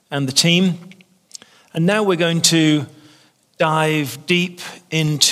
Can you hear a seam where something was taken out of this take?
no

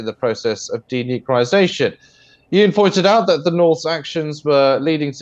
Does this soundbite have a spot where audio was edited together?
no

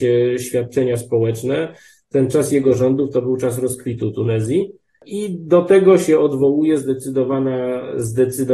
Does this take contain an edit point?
no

